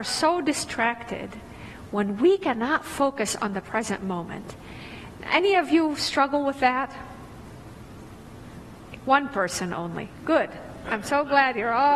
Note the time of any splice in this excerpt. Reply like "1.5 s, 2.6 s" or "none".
none

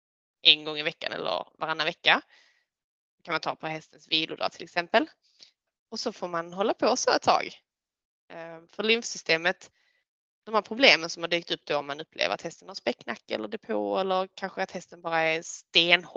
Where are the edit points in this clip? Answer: 5.7 s

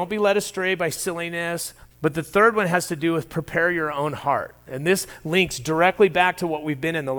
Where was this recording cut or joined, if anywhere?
1.9 s

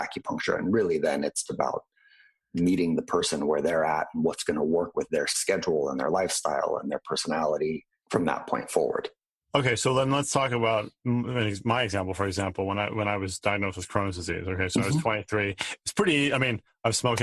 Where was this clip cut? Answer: 1.5 s

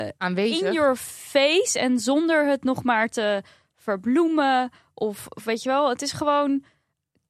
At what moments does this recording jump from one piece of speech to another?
none

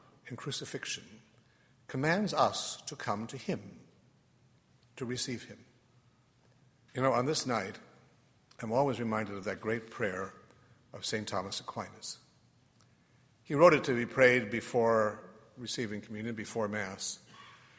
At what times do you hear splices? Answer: 6.9 s

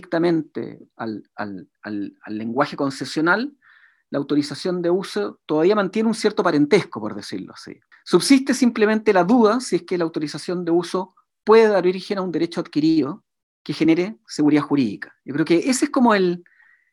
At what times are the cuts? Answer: 1.8 s, 7.9 s

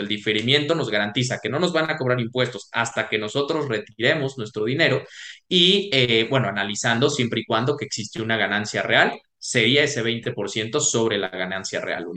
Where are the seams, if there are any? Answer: none

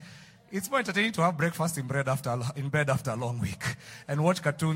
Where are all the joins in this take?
none

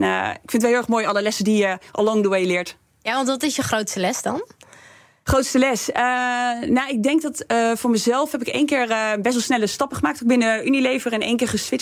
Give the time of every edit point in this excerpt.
none

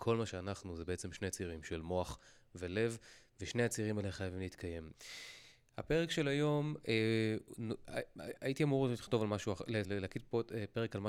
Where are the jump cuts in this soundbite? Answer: 4.9 s, 9.8 s

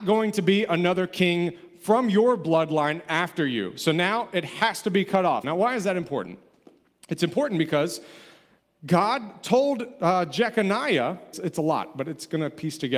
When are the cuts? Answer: 5.4 s, 11.3 s

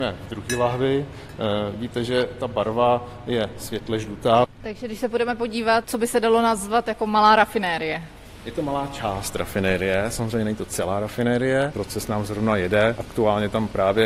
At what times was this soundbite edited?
5.8 s

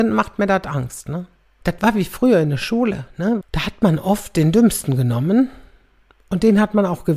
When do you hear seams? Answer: 1.6 s, 3.4 s

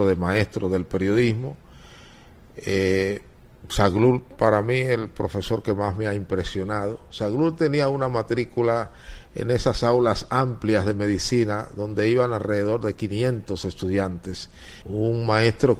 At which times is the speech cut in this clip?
14.8 s

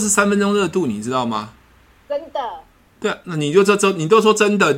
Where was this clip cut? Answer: none

